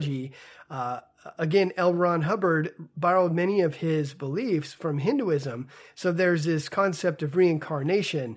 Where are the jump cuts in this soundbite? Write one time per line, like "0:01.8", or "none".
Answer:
none